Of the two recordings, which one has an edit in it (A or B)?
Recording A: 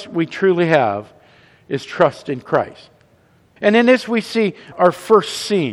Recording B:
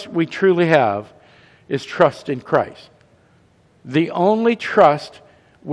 A